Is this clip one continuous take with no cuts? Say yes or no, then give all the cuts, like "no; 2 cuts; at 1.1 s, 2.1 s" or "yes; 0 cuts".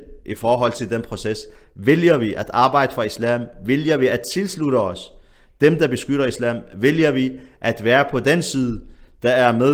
yes; 0 cuts